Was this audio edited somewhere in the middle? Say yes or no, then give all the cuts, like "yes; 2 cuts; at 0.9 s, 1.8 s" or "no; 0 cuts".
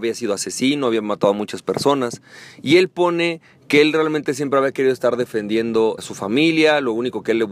yes; 1 cut; at 6.0 s